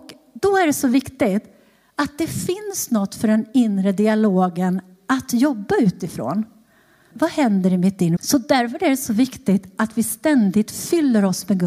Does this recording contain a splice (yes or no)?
yes